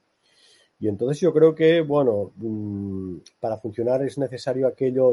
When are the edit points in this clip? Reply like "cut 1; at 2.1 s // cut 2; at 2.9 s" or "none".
none

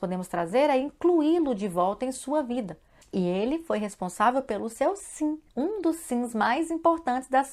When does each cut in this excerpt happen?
cut 1; at 3.0 s // cut 2; at 5.5 s

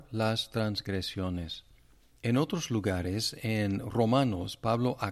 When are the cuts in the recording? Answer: none

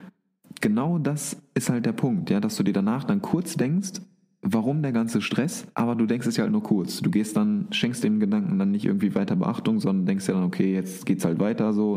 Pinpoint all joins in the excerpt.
cut 1; at 5.7 s

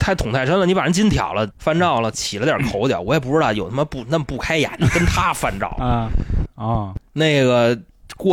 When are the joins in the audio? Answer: cut 1; at 1.5 s // cut 2; at 6.5 s

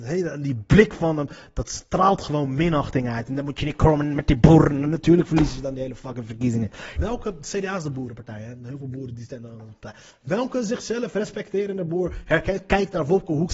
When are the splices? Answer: cut 1; at 7.0 s

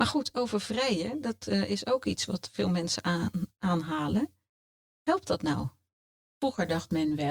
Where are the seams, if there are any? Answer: none

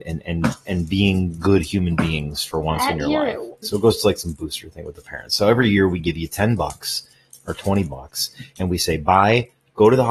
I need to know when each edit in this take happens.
cut 1; at 3.6 s

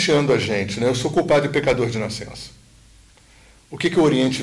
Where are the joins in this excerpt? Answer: none

